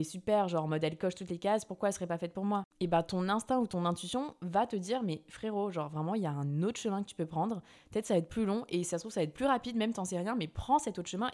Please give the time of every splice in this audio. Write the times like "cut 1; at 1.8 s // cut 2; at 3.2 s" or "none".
none